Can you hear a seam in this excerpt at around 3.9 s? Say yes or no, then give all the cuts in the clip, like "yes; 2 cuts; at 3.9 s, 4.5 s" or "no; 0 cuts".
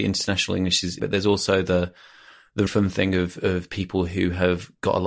no; 2 cuts; at 1.0 s, 2.7 s